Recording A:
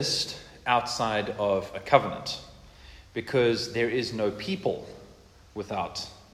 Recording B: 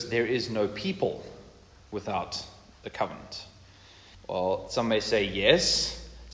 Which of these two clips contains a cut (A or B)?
B